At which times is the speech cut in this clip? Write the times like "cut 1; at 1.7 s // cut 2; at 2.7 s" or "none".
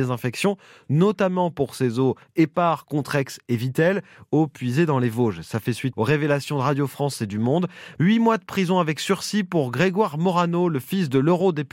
cut 1; at 5.9 s // cut 2; at 8.0 s